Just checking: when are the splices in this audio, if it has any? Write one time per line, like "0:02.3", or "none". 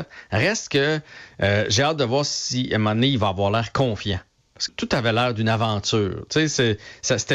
0:04.7